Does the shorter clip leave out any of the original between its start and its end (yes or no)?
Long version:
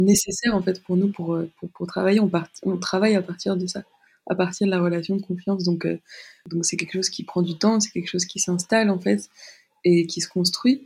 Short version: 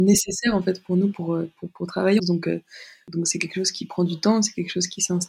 yes